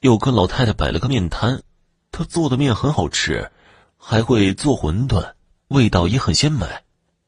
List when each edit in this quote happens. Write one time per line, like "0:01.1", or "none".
none